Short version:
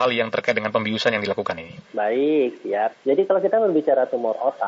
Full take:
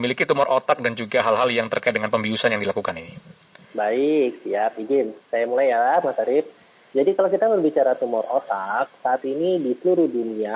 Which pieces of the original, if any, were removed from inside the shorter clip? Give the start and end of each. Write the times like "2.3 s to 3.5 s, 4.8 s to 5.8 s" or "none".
3.2 s to 3.6 s, 4.7 s to 6.8 s